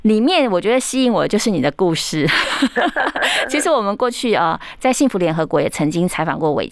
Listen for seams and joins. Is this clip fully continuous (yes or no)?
yes